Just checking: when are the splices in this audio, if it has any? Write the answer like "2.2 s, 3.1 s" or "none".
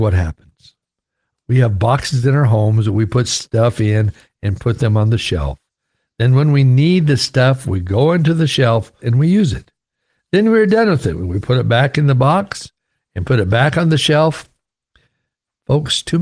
1.3 s, 9.0 s